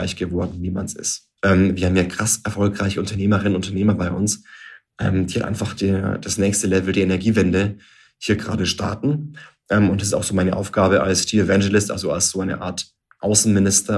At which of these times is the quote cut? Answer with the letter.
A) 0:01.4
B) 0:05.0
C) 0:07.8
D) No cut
A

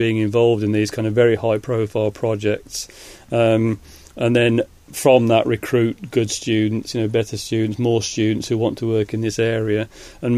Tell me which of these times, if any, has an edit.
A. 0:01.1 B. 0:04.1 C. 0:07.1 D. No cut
D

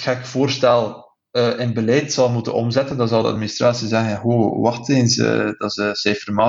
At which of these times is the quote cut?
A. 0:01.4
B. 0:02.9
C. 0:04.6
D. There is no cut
D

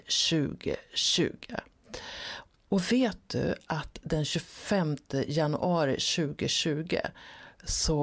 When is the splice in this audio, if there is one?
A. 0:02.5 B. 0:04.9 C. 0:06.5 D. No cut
A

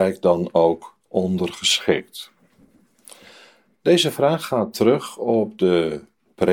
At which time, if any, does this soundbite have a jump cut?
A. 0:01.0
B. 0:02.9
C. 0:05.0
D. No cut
D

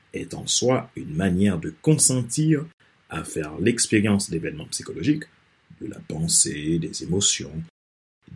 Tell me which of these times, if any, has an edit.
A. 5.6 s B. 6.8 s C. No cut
C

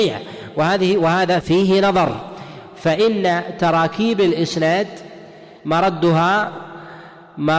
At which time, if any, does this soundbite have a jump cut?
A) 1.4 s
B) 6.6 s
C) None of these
A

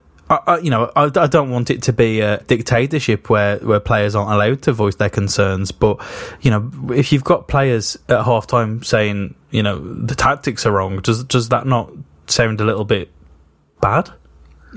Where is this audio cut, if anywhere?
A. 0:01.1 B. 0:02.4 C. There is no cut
B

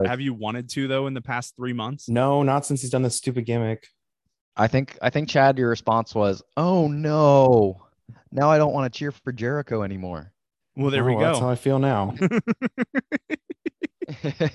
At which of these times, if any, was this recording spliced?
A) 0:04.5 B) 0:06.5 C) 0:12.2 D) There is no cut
C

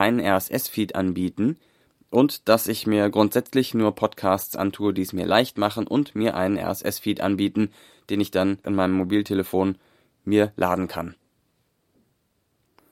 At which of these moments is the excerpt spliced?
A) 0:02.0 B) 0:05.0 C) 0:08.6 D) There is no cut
C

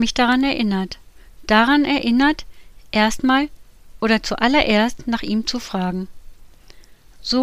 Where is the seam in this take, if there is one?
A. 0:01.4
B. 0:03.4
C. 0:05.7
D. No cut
D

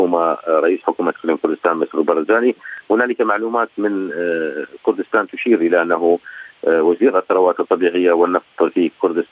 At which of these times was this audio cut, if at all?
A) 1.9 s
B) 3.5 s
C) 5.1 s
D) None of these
D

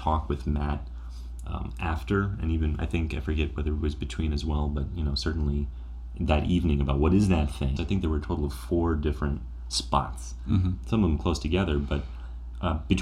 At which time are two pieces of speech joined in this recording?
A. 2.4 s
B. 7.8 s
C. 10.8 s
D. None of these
B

